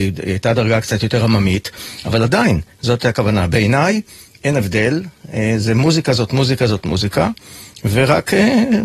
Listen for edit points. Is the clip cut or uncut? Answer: uncut